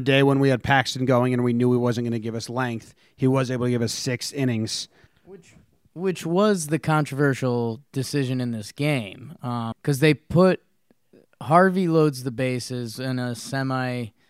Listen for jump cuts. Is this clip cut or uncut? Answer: cut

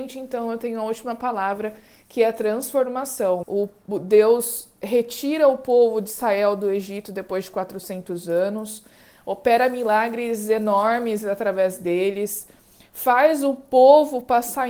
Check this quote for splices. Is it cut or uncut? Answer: cut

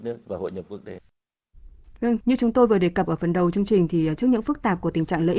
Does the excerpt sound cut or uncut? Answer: cut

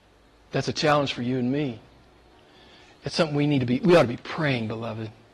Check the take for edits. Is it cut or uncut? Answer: uncut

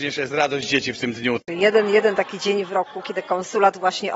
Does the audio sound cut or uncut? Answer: cut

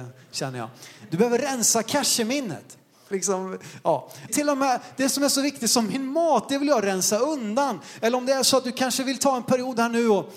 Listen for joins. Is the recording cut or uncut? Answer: cut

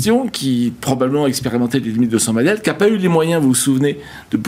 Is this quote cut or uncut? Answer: uncut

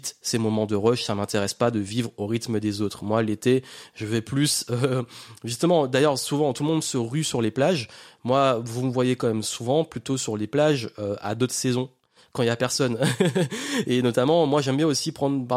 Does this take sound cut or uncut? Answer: uncut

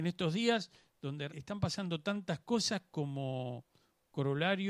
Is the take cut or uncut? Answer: cut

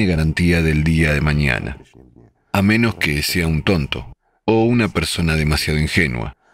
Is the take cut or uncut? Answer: uncut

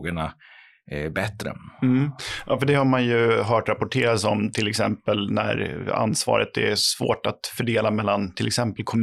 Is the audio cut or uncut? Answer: uncut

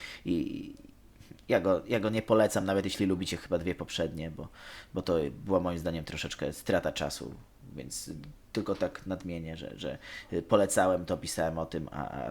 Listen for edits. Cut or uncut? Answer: uncut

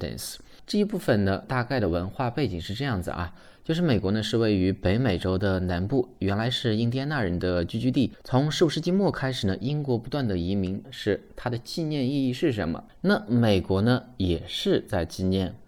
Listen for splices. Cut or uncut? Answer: cut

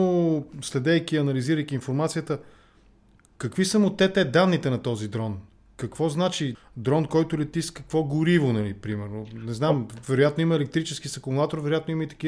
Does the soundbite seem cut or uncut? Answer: cut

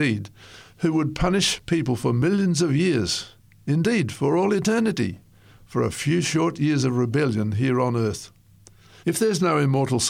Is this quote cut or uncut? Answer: cut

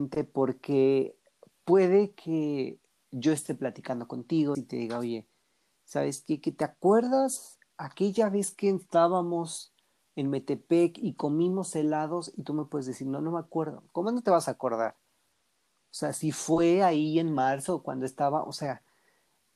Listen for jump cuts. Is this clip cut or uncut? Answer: cut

